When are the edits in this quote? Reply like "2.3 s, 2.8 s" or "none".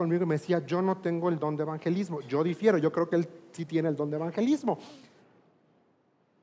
none